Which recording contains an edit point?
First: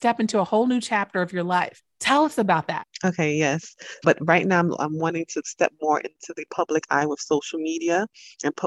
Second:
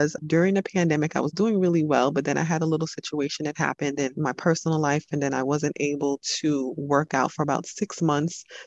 first; 1 cut; at 4.0 s

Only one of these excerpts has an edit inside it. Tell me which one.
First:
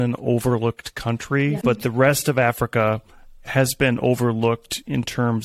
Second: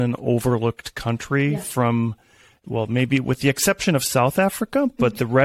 first; 1 cut; at 1.6 s

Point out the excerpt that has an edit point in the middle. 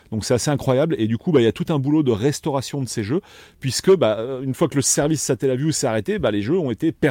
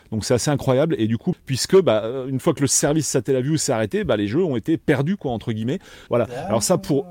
second; 2 cuts; at 1.3 s, 6.1 s

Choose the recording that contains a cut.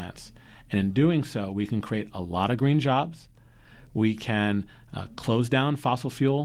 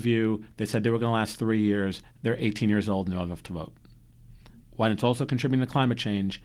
second; 1 cut; at 4.6 s

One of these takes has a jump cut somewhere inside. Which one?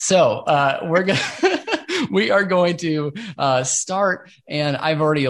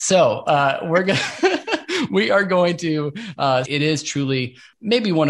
second; 1 cut; at 3.6 s

